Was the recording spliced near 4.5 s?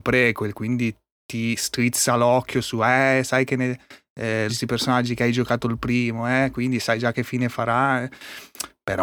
yes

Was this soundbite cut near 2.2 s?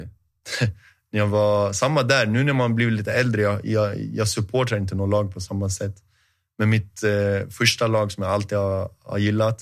no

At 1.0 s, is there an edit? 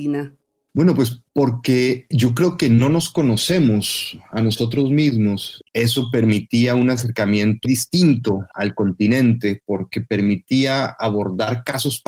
no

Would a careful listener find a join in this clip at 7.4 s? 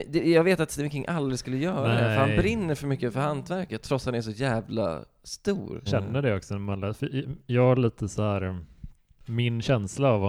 no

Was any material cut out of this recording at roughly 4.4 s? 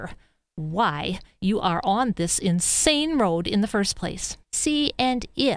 yes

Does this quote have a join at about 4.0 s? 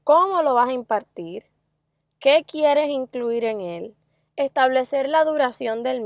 no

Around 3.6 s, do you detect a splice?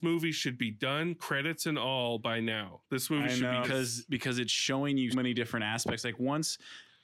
yes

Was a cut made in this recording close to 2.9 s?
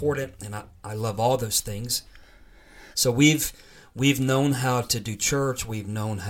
yes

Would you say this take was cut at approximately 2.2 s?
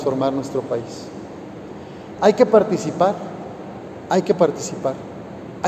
yes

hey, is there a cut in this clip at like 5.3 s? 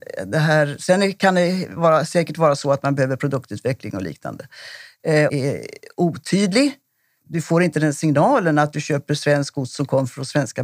yes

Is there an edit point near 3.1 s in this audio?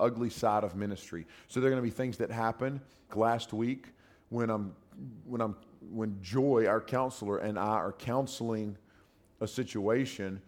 yes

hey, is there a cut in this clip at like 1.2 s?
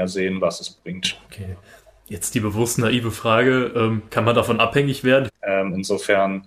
yes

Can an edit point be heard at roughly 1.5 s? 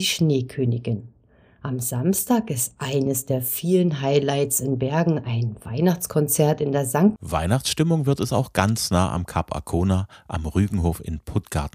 no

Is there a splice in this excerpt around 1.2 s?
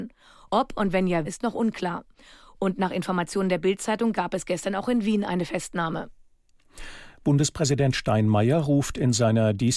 yes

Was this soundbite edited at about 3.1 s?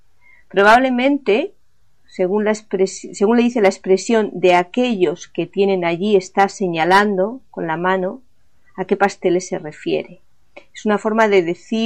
no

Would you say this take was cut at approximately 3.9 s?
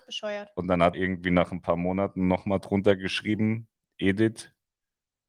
no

